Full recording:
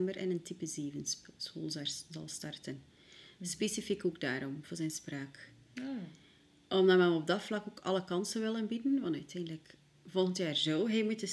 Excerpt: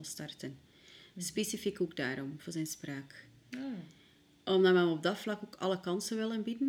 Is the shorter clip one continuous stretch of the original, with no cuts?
yes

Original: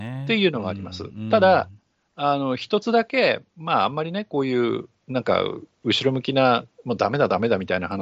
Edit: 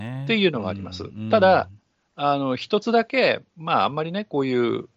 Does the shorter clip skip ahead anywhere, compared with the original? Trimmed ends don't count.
no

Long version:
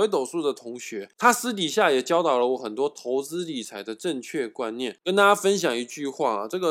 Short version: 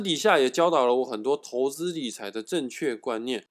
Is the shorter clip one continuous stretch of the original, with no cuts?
yes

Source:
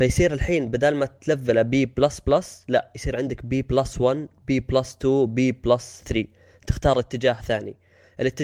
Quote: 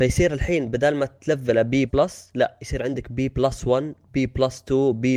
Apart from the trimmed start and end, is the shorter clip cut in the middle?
yes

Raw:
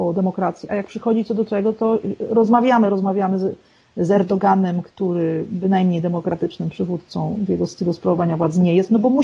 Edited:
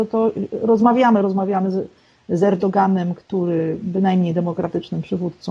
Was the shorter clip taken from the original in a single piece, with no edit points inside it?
yes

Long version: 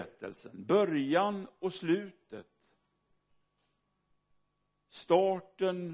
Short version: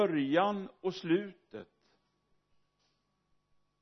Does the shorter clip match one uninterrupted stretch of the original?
yes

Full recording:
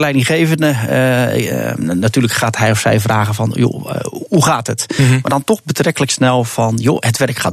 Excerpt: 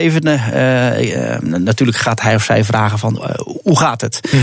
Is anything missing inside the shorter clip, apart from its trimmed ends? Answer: yes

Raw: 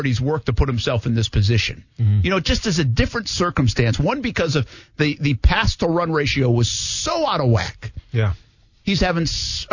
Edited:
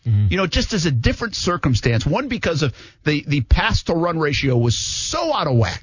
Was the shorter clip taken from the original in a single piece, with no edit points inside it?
yes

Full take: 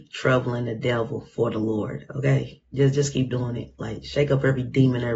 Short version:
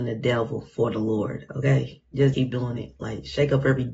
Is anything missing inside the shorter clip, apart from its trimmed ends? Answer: yes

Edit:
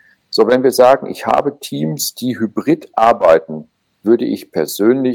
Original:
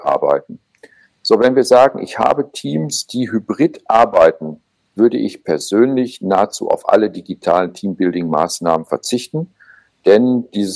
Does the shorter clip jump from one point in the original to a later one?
no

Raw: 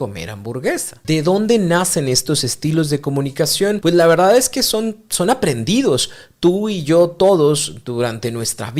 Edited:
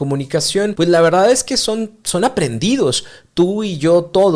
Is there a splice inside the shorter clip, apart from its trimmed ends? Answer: no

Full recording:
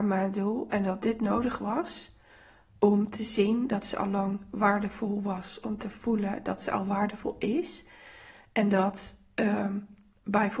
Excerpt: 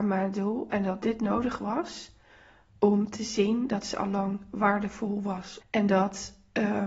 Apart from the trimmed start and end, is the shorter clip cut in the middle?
yes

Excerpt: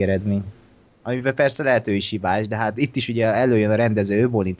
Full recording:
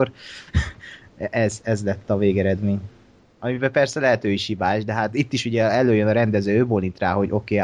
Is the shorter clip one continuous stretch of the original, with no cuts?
yes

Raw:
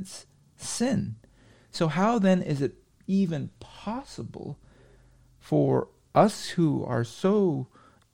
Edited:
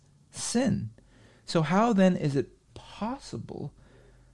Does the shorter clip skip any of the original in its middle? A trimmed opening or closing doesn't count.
yes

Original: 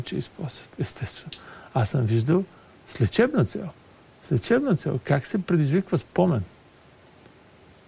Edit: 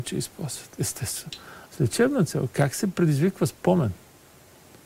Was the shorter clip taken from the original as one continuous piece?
no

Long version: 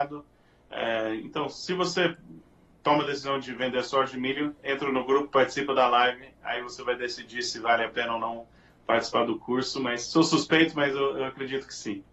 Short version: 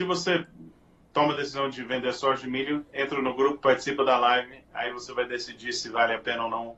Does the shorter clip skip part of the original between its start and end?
no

